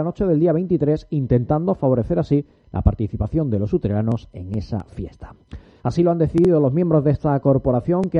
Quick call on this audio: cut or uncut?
cut